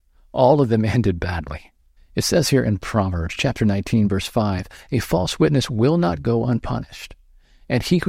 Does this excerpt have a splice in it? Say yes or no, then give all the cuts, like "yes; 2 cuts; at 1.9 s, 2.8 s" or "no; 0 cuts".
yes; 1 cut; at 2.0 s